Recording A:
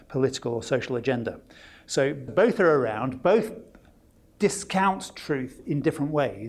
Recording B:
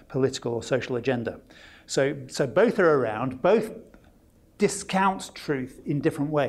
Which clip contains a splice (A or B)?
A